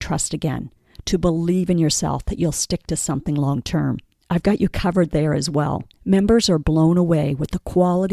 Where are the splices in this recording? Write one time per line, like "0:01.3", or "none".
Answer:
0:04.2
0:05.9